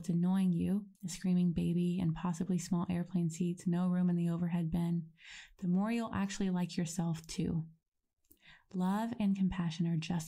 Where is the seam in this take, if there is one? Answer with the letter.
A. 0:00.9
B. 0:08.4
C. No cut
A